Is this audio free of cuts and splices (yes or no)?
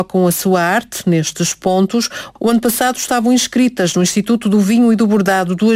yes